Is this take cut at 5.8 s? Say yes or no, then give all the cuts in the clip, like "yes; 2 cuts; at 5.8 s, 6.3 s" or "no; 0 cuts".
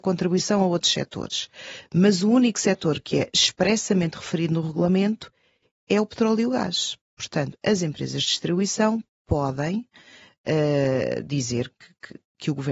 no; 0 cuts